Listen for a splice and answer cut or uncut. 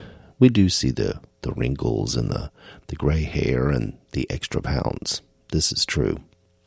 uncut